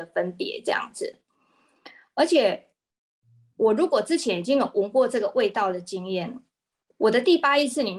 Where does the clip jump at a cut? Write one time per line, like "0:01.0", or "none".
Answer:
none